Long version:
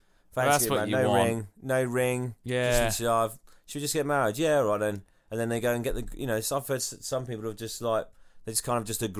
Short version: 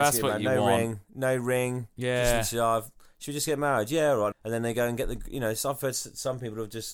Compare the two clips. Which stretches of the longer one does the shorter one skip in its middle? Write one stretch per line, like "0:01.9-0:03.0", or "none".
0:04.8-0:05.2